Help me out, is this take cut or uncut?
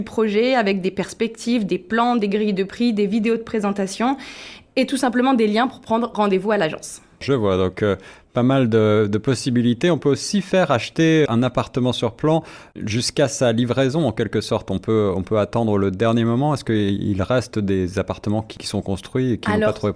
cut